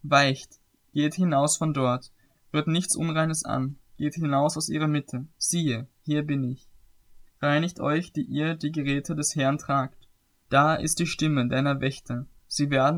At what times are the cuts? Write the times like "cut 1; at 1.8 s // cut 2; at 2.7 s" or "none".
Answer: cut 1; at 5.4 s // cut 2; at 7.3 s // cut 3; at 10.4 s